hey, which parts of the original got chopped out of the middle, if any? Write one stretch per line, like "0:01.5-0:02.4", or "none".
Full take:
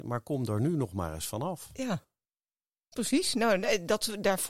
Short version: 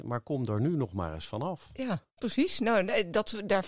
0:02.1-0:02.8